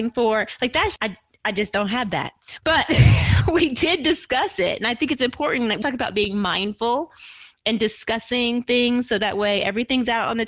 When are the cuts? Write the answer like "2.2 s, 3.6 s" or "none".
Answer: 1.0 s, 5.8 s